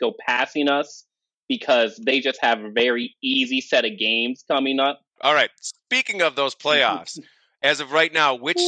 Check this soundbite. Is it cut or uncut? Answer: cut